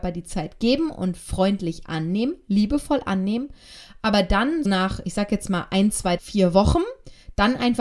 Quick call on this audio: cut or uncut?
cut